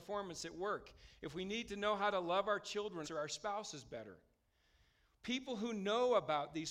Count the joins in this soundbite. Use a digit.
1